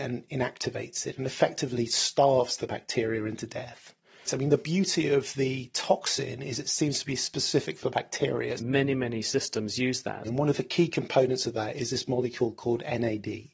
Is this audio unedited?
no; 3 cuts; at 4.3 s, 8.6 s, 10.2 s

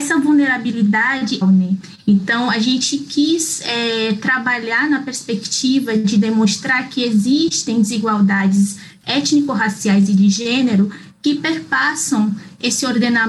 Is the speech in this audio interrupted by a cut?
yes; 1 cut; at 1.4 s

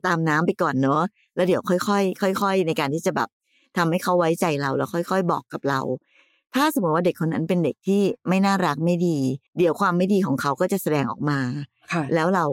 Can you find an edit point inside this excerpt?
yes; 1 cut; at 9.5 s

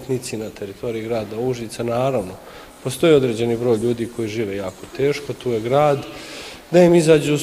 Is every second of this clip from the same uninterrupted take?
yes; 0 cuts

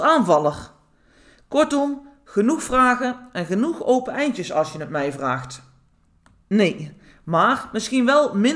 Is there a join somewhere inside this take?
yes; 1 cut; at 6.4 s

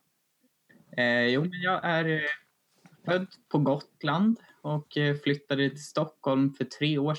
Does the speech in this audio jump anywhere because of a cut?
no; 0 cuts

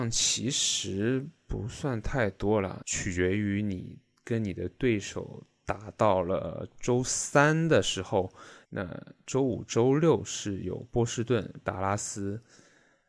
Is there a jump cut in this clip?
yes; 2 cuts; at 8.6 s, 11.6 s

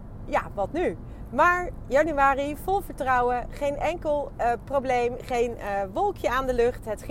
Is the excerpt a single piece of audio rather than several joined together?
yes; 0 cuts

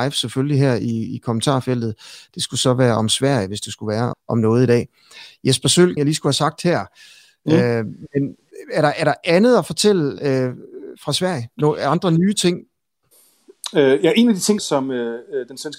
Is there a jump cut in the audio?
yes; 3 cuts; at 4.1 s, 6.0 s, 14.6 s

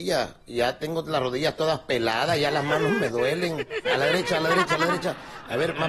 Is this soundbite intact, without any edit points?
no; 1 cut; at 3.8 s

